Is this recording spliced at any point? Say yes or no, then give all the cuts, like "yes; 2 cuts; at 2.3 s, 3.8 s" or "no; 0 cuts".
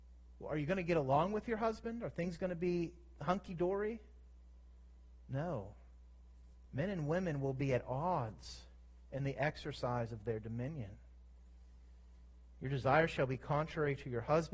no; 0 cuts